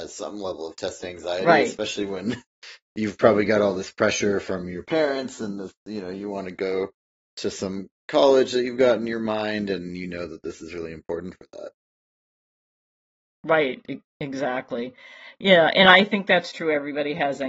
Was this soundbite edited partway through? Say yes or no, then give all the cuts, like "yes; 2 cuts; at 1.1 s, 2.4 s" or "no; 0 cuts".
no; 0 cuts